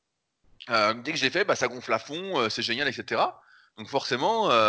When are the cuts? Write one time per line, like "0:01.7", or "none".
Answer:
none